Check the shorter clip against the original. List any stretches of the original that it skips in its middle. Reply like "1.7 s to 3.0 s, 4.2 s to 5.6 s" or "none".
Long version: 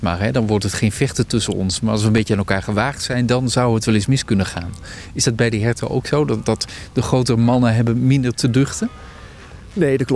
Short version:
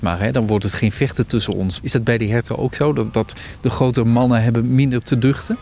1.8 s to 5.1 s